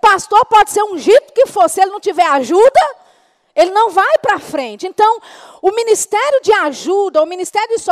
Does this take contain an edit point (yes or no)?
no